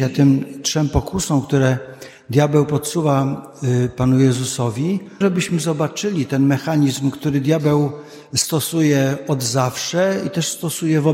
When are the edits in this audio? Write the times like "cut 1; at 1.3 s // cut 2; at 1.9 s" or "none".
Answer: cut 1; at 5.2 s

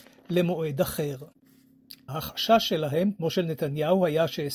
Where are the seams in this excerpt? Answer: cut 1; at 2.1 s

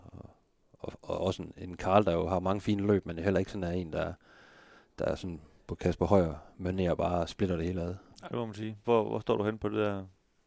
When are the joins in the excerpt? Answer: cut 1; at 8.8 s

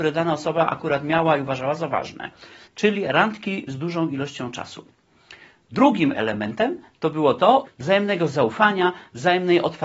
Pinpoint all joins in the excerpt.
cut 1; at 2.6 s // cut 2; at 7.6 s

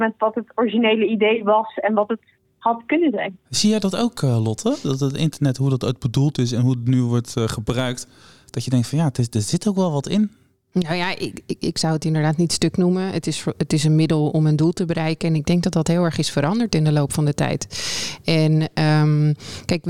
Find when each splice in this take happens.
cut 1; at 3.4 s

